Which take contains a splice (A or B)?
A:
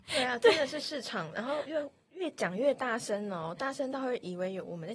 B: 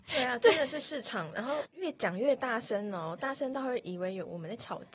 B